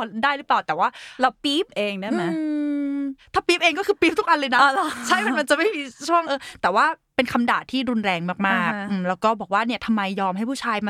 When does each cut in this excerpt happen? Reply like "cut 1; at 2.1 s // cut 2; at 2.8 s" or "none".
cut 1; at 6.3 s